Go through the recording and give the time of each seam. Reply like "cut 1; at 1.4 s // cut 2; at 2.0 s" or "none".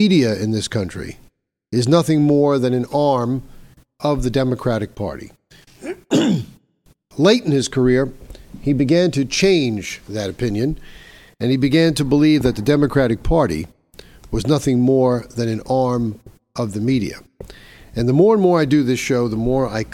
none